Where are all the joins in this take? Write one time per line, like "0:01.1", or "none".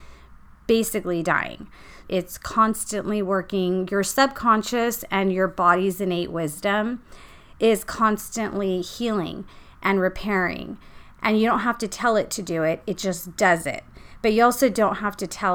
0:02.0